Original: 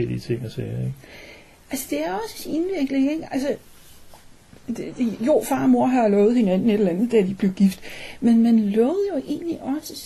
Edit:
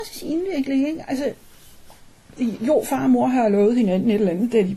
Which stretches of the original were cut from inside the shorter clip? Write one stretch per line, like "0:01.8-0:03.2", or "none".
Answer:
0:04.6-0:04.9